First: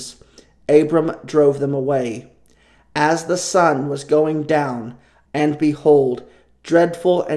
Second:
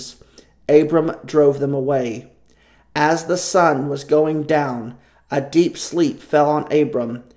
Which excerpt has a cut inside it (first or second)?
first